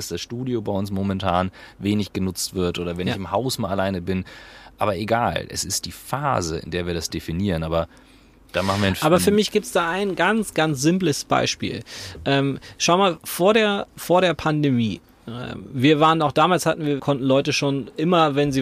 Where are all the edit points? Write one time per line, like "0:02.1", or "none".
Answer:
0:13.9
0:17.0